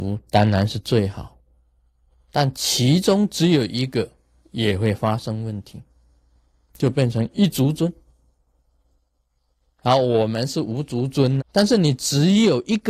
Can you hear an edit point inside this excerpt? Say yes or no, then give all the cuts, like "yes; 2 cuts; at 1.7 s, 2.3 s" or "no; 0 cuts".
yes; 1 cut; at 11.4 s